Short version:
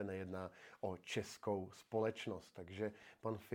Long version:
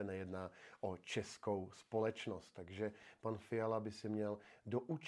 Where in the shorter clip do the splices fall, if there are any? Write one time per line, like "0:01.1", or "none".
none

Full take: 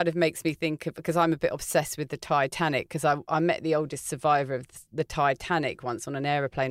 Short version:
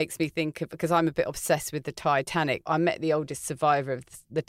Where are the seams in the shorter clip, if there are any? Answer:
0:02.6

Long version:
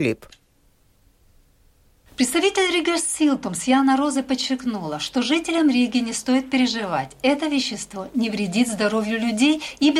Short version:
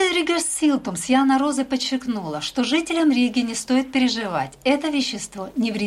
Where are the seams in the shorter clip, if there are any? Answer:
none

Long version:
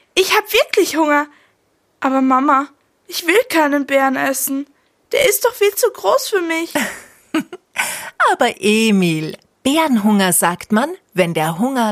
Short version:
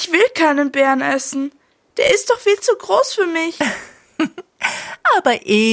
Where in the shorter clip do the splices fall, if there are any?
none

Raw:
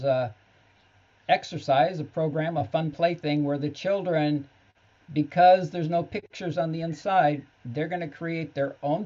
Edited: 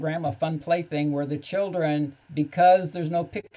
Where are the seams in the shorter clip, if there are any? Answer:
0:02.2

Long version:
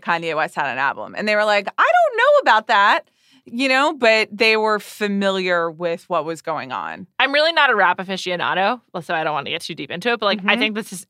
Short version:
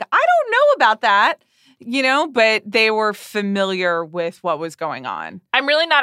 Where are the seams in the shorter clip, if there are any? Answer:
none

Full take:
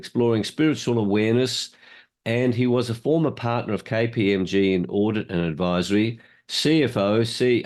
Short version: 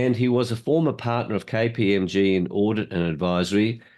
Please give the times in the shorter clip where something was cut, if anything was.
none

